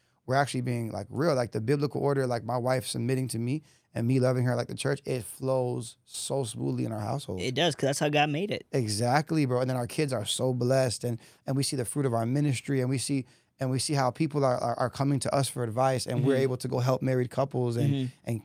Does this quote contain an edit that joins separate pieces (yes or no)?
no